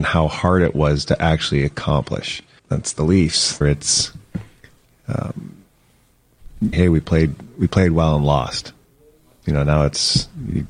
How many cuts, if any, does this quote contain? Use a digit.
3